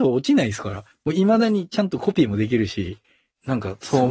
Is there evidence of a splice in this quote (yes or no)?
no